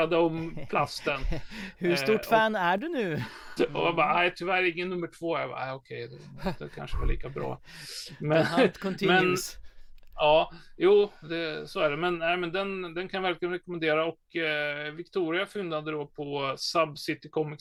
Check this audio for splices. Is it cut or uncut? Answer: cut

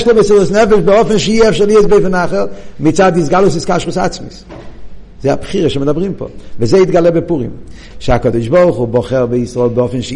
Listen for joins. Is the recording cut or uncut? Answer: cut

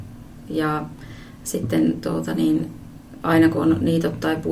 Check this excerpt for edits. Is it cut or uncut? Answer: uncut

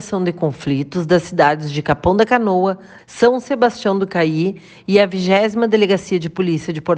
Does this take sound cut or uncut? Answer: cut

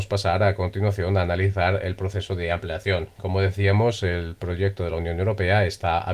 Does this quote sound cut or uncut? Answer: uncut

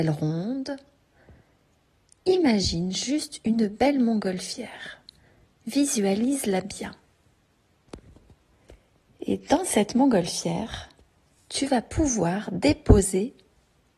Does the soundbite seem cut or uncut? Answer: uncut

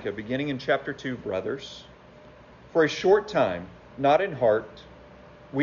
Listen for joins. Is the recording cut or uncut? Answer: cut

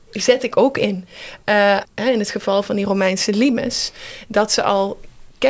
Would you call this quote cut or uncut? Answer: cut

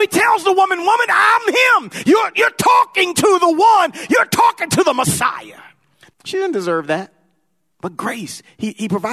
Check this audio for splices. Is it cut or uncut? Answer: cut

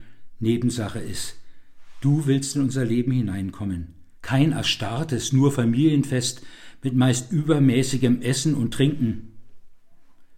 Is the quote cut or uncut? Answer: cut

